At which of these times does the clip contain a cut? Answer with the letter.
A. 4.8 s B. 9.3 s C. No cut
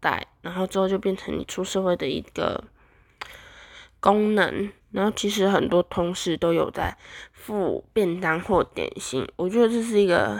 A